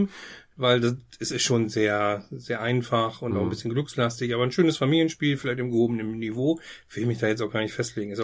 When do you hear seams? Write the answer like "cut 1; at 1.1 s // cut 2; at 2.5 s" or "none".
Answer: none